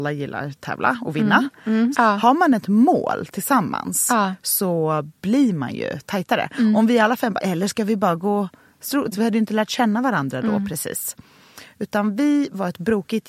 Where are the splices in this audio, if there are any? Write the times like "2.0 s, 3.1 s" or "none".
1.9 s, 7.4 s, 9.1 s